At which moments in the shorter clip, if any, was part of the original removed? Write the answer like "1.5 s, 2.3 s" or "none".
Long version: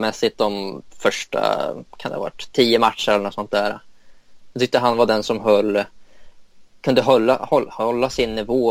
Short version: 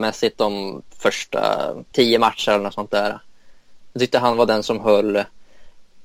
1.9 s